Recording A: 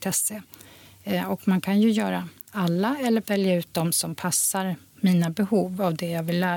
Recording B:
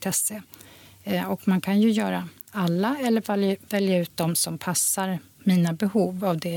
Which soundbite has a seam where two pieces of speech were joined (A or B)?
A